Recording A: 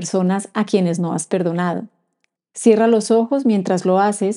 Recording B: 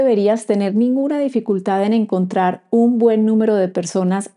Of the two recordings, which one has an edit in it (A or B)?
A